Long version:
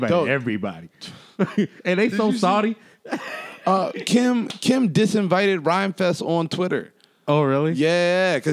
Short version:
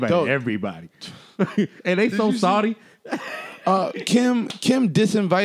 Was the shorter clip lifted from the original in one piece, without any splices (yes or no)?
yes